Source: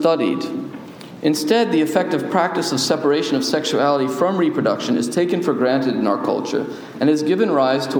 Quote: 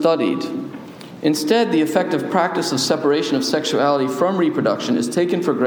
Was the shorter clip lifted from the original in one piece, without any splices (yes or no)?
yes